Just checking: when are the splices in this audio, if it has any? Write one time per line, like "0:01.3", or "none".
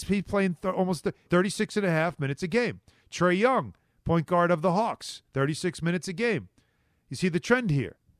0:01.3